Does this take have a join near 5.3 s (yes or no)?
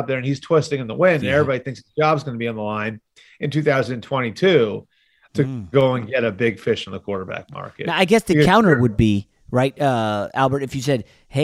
yes